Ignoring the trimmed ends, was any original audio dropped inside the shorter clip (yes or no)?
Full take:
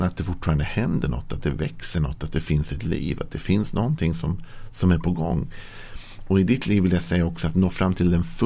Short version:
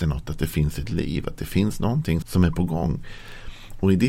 yes